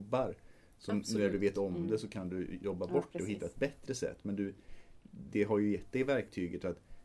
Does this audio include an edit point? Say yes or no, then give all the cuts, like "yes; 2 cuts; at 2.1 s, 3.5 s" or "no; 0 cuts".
no; 0 cuts